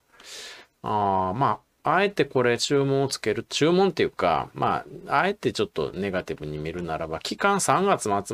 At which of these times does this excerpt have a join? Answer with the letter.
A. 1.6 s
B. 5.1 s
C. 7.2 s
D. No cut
D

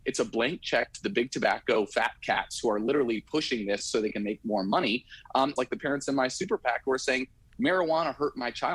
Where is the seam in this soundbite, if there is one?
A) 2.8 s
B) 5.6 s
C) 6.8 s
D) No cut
B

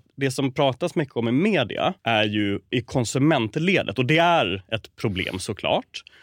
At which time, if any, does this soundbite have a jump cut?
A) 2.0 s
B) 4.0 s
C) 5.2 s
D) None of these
A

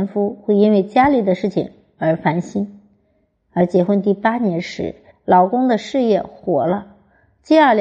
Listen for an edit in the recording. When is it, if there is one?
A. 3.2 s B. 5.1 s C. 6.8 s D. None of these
B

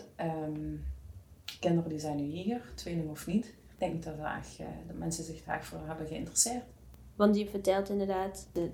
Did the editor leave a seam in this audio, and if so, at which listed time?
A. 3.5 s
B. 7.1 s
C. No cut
C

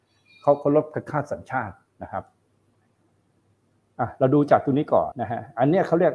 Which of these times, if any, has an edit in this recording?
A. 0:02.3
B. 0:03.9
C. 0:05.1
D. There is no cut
C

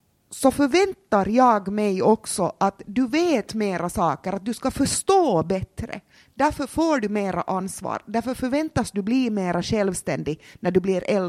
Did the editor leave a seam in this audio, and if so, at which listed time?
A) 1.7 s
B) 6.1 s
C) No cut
C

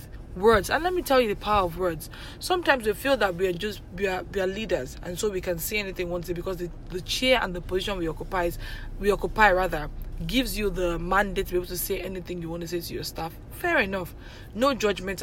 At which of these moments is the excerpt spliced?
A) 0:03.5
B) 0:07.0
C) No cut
C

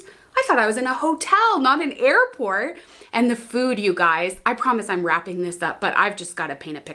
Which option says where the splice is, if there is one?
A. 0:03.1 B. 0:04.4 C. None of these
C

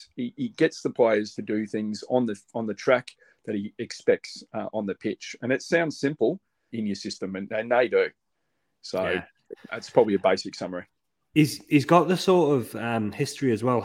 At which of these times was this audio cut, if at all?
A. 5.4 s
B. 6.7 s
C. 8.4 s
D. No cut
B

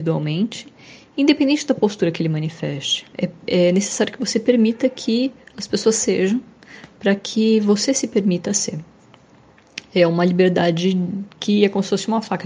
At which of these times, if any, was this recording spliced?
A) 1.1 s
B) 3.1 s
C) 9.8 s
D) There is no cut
B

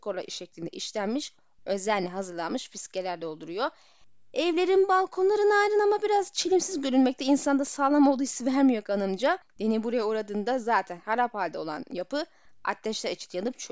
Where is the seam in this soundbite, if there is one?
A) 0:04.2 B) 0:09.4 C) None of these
B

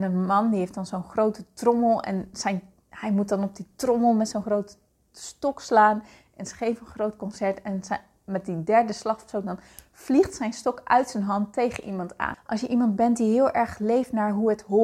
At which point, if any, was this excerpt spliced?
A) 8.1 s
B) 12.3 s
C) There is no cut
B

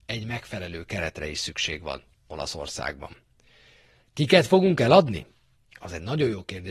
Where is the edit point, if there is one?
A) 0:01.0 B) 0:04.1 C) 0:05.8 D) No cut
D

